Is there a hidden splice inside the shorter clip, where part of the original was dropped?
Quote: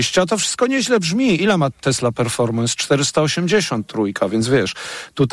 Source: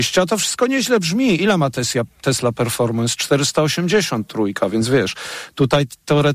yes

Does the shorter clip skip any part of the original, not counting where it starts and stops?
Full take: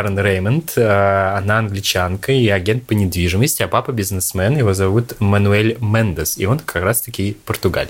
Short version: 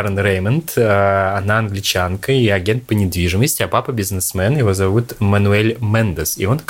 no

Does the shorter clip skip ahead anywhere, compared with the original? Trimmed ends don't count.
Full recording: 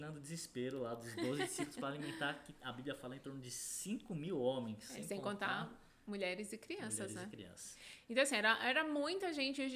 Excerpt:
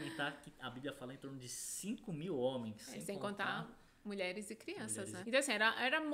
yes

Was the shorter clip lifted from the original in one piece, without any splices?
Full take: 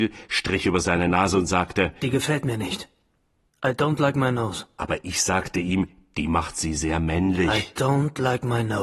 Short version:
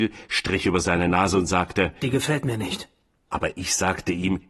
no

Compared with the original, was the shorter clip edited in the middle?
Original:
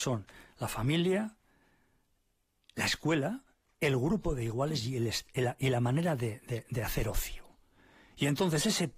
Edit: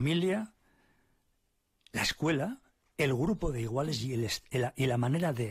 no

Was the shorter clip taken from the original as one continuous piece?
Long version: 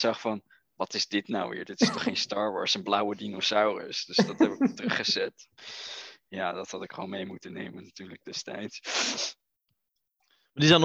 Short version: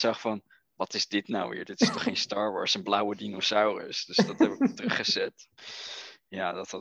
yes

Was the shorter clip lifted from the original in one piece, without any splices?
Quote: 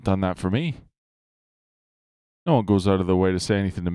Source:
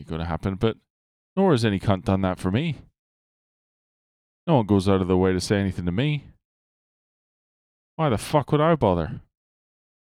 yes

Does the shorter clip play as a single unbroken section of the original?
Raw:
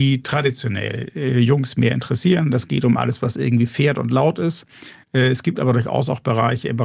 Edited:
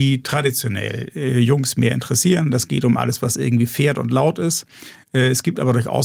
yes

